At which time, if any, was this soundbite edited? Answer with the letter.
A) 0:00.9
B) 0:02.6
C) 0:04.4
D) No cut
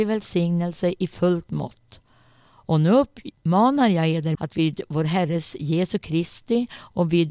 C